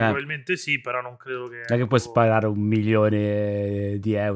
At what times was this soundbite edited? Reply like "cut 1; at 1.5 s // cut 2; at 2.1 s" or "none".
none

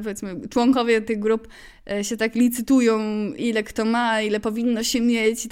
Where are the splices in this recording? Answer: cut 1; at 3.4 s

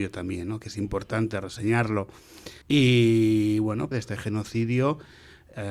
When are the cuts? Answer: cut 1; at 2.6 s // cut 2; at 3.9 s

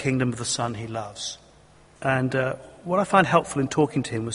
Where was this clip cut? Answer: cut 1; at 2.0 s

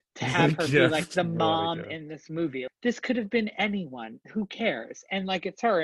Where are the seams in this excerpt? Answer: cut 1; at 2.7 s

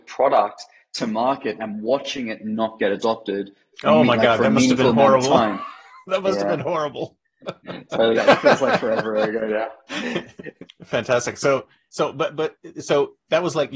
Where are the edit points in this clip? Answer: cut 1; at 8.1 s // cut 2; at 10.6 s

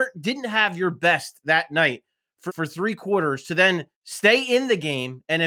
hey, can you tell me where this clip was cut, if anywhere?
cut 1; at 2.5 s // cut 2; at 3.9 s

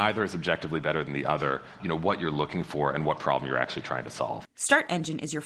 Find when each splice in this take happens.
cut 1; at 1.8 s // cut 2; at 4.4 s

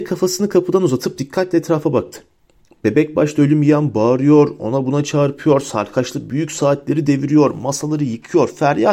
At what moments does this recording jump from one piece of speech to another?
none

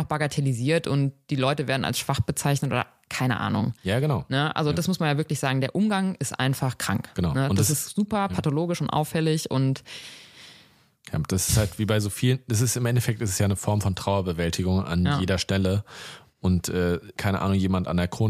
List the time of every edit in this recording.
cut 1; at 17.2 s

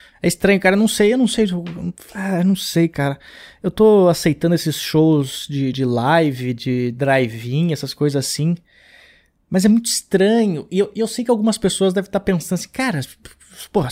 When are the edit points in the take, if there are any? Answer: none

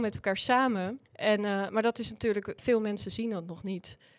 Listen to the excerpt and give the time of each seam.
cut 1; at 1.1 s // cut 2; at 2.6 s

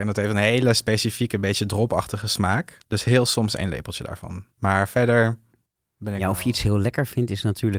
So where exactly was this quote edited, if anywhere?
cut 1; at 2.8 s // cut 2; at 4.5 s

